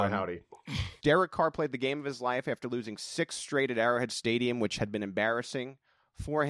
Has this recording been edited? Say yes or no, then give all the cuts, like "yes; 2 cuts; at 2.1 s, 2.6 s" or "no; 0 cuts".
yes; 1 cut; at 1.0 s